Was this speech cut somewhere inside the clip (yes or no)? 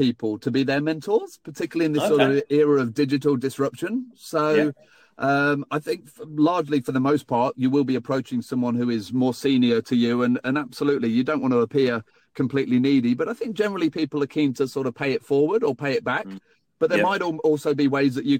no